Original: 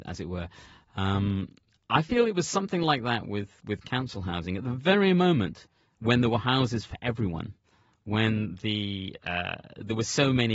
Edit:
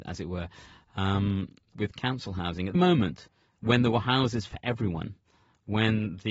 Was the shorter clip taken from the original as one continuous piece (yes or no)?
no